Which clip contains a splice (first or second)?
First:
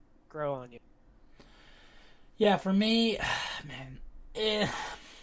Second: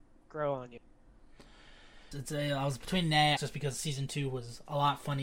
second